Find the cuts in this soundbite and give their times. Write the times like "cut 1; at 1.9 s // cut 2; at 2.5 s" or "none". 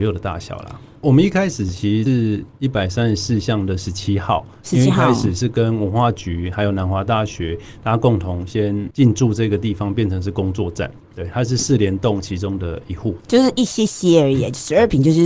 cut 1; at 1.0 s // cut 2; at 11.0 s